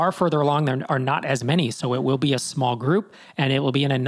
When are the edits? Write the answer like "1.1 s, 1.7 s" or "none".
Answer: none